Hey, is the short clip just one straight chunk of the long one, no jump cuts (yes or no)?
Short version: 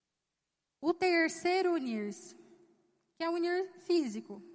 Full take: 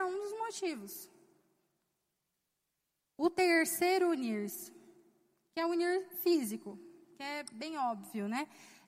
yes